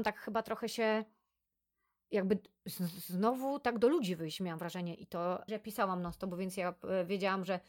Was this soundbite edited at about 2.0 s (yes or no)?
no